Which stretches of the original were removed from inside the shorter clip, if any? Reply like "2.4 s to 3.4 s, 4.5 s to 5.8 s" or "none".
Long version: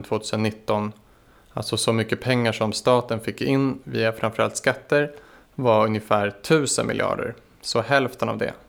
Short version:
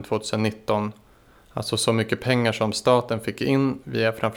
none